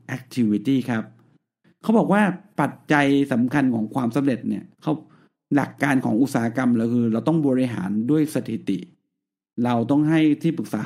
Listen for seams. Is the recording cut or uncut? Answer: cut